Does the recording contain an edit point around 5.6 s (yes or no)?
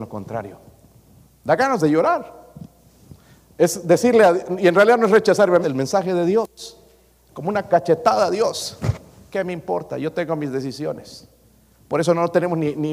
yes